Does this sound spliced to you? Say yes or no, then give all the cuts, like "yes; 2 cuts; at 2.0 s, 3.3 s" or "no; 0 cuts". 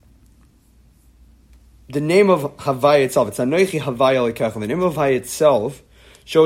no; 0 cuts